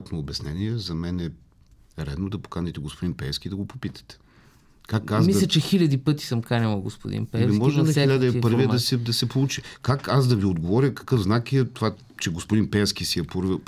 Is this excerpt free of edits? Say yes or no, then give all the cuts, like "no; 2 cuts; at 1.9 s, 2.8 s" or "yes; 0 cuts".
yes; 0 cuts